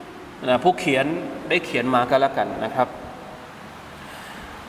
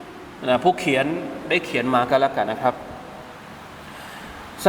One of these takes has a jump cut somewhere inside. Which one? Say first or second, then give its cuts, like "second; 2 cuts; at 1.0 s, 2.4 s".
second; 1 cut; at 2.5 s